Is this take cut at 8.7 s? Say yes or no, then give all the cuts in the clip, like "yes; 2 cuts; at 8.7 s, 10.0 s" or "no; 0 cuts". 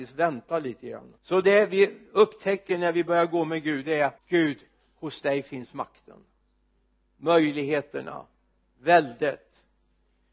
no; 2 cuts; at 1.2 s, 4.2 s